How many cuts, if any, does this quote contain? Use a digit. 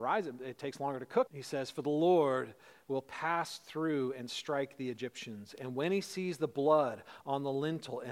1